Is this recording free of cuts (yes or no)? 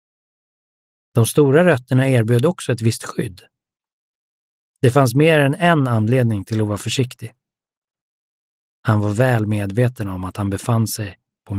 yes